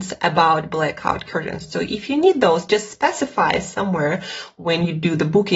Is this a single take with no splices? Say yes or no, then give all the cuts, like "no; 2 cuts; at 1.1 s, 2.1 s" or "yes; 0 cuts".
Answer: yes; 0 cuts